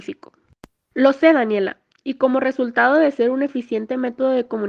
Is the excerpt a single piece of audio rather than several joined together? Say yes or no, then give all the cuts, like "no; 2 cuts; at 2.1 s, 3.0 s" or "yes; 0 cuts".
no; 1 cut; at 0.9 s